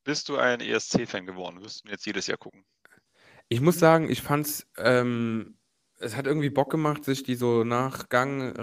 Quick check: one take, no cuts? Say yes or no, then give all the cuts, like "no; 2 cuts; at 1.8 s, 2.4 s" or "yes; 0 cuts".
yes; 0 cuts